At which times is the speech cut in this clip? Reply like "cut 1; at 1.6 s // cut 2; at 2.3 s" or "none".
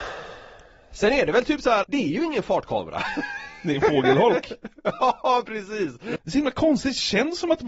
cut 1; at 1.8 s // cut 2; at 6.2 s